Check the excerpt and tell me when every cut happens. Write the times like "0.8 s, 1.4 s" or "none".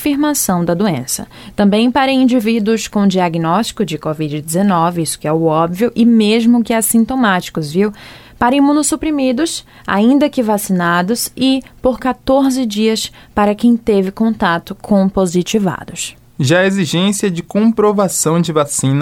none

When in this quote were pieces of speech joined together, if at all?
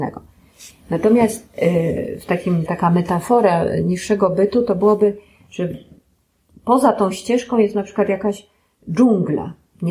2.7 s

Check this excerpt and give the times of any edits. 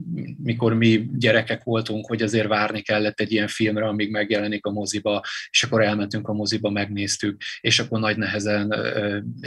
none

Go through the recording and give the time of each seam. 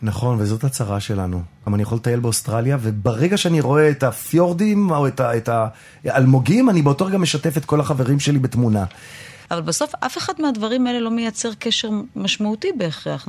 1.7 s, 9.5 s

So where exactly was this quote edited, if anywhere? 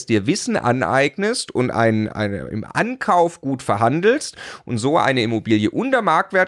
none

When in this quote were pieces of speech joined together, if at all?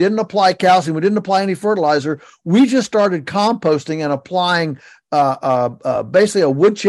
none

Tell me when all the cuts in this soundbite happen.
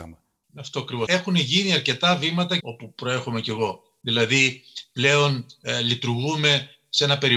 1.1 s, 2.6 s

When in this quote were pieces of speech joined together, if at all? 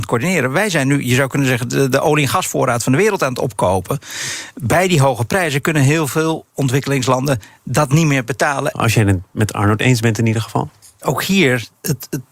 8.7 s, 11.0 s

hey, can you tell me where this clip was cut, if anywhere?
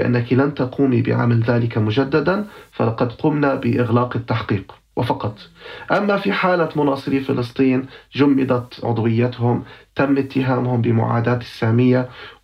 4.9 s

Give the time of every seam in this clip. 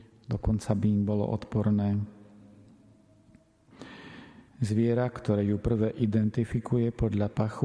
4.5 s

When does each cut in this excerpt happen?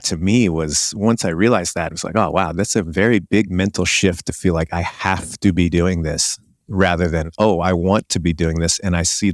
none

